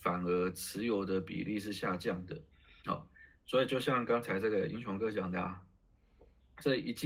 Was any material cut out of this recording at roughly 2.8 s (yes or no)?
yes